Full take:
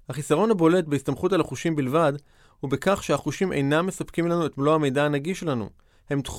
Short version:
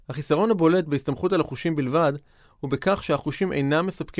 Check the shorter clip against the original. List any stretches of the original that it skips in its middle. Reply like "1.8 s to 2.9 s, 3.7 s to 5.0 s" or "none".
none